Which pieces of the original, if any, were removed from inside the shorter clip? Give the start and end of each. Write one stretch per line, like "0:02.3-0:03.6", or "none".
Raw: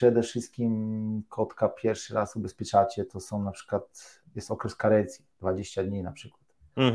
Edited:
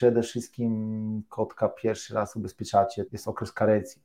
0:03.1-0:04.3